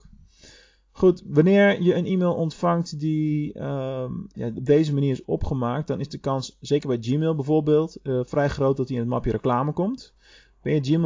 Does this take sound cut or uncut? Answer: uncut